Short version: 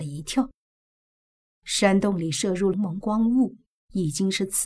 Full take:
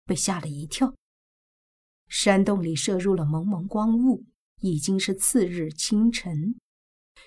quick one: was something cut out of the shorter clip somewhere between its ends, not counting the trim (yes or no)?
yes